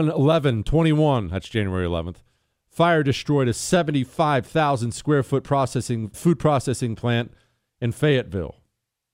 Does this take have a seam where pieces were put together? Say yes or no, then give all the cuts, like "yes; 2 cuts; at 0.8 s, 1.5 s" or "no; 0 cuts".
yes; 1 cut; at 6.1 s